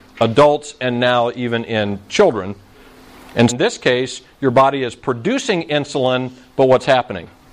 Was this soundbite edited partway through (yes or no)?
yes